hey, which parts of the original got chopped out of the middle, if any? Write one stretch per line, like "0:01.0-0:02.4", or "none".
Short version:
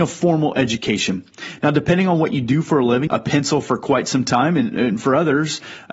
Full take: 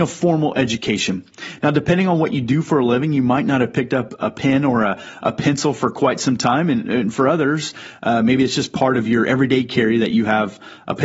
0:03.1-0:05.2